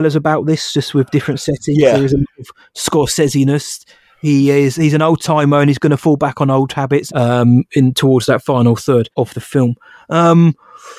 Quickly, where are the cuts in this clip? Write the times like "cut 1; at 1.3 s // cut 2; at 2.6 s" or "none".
cut 1; at 7.1 s // cut 2; at 9.1 s